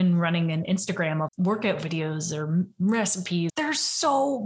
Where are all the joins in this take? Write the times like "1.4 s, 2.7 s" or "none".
1.3 s, 3.5 s